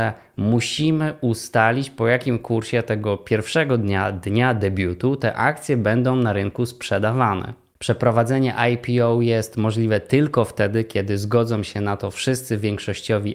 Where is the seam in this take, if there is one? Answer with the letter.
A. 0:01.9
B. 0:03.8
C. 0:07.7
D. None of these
C